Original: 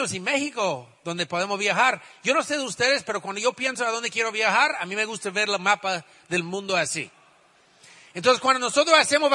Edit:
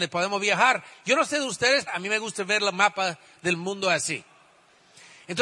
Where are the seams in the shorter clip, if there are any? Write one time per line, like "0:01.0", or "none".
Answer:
0:01.9